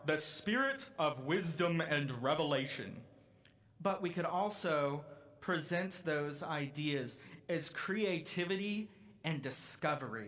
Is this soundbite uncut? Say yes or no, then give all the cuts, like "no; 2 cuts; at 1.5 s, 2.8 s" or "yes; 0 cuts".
yes; 0 cuts